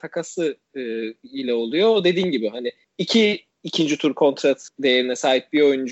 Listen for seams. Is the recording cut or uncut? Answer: uncut